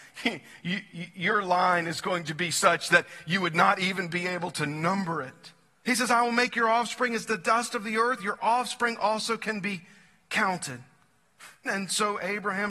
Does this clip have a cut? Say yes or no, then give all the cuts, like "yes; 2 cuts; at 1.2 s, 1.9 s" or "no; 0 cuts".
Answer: yes; 3 cuts; at 5.8 s, 8.2 s, 11.7 s